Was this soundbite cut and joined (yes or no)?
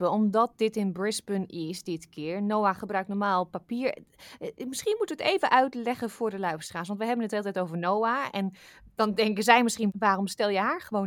no